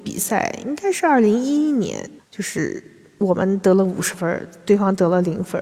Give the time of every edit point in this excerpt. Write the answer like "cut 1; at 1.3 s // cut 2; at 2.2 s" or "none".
cut 1; at 2.2 s